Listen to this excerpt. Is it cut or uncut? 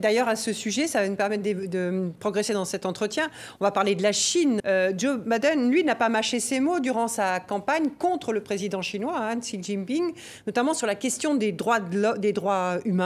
cut